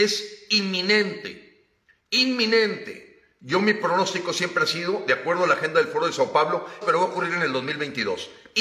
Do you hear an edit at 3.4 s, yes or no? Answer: no